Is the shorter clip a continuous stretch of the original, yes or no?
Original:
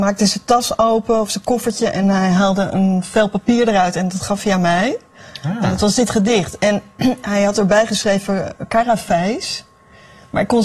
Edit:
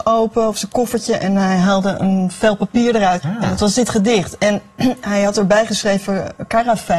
no